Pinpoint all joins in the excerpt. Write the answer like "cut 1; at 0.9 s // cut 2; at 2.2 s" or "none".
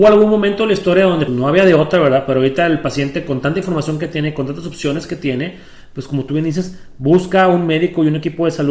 cut 1; at 1.3 s